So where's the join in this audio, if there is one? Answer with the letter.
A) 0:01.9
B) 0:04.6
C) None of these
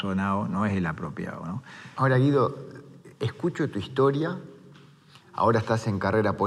A